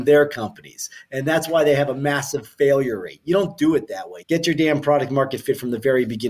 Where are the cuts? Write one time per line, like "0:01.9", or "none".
0:04.2